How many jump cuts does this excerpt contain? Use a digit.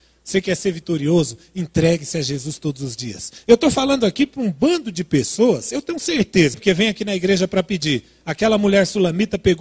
1